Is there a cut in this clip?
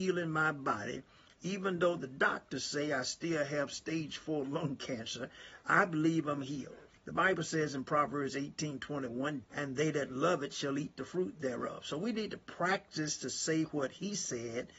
yes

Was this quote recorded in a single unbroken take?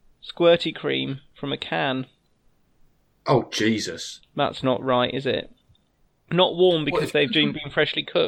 no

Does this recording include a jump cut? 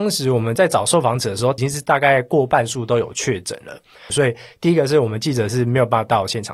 yes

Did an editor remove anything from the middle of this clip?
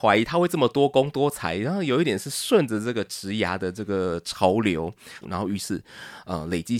yes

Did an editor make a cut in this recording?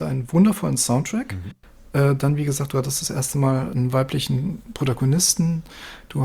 no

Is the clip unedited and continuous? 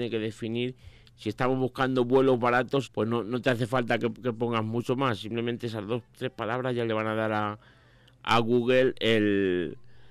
no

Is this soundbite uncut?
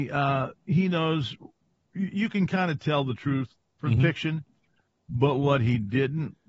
yes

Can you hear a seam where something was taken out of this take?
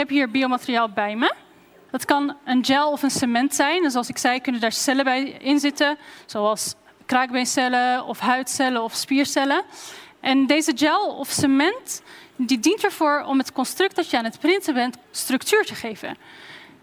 yes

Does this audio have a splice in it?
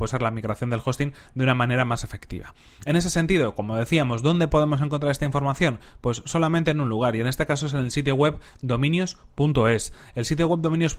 no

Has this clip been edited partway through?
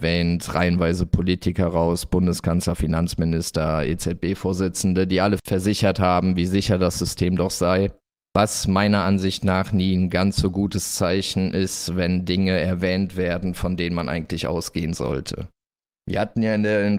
no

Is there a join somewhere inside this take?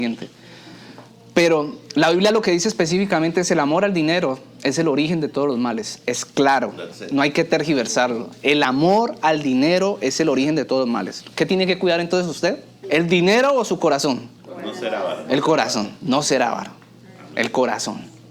yes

